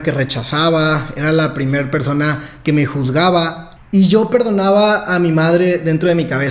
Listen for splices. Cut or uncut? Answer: cut